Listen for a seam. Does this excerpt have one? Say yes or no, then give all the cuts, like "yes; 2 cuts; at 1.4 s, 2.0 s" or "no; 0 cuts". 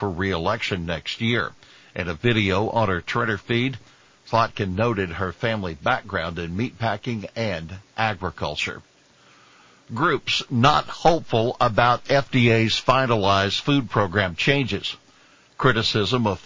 no; 0 cuts